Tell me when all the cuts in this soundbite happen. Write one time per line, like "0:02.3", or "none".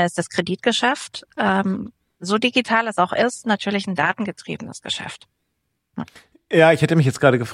none